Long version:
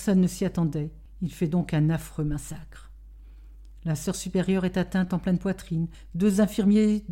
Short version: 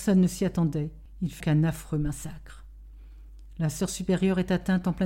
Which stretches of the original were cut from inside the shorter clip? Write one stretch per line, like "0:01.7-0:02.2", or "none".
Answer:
0:01.4-0:01.7